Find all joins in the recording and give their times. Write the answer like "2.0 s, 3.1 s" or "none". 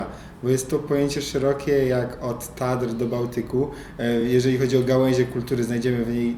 none